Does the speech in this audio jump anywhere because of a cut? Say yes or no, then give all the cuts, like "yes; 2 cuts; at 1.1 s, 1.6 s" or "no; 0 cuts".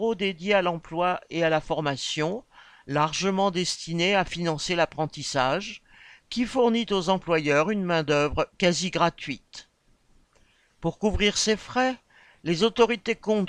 no; 0 cuts